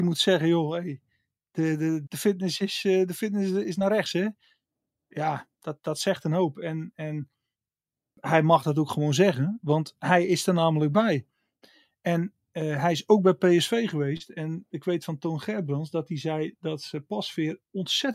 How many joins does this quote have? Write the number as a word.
one